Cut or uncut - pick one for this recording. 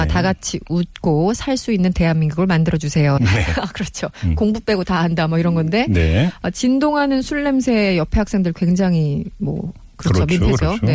cut